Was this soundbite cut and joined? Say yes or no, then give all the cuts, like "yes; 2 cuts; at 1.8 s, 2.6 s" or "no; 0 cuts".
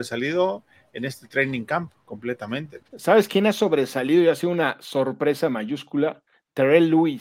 no; 0 cuts